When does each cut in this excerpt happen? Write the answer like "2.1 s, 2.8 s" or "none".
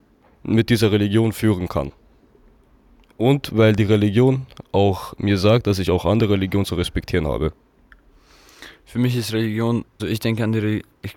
10.0 s